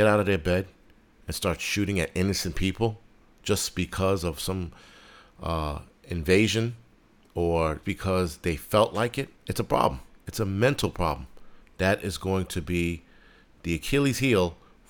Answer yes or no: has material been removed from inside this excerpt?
yes